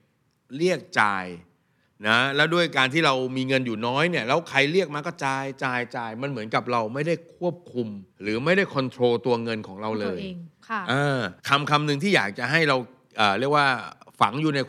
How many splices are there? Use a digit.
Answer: 2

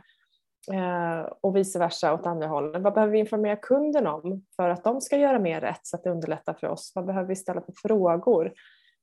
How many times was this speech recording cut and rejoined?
0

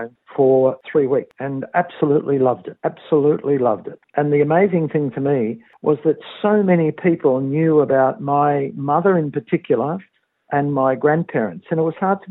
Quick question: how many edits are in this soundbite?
1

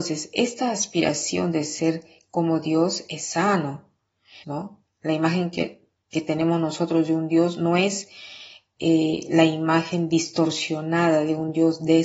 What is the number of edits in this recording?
1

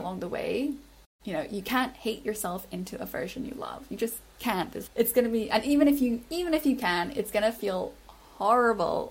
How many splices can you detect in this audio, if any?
2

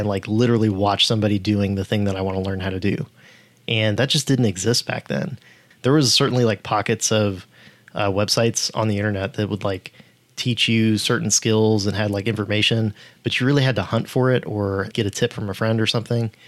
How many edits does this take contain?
2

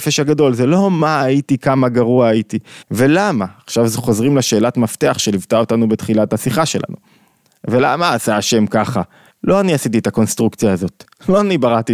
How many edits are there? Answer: 2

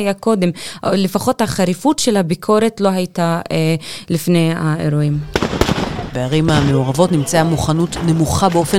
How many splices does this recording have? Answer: 1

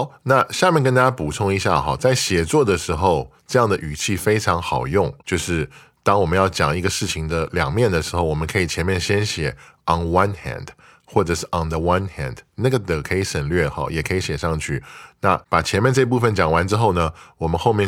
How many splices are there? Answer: 0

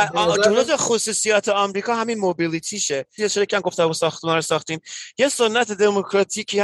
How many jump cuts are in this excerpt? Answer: 1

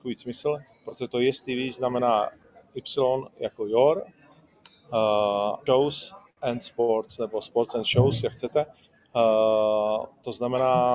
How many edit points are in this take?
1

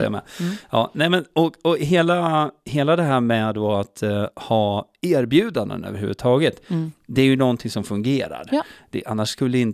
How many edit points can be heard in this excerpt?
0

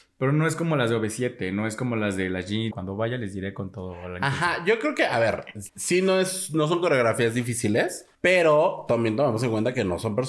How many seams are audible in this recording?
3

